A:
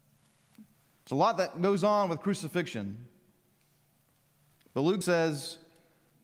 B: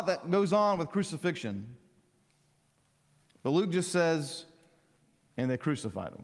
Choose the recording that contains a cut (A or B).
A